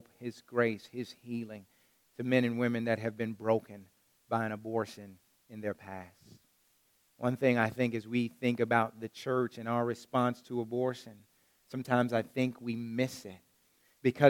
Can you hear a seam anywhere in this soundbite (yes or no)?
no